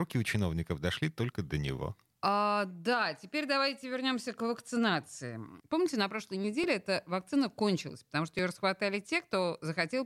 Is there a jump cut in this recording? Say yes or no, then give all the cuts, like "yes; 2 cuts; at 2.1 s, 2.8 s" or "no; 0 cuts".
yes; 2 cuts; at 2.1 s, 5.6 s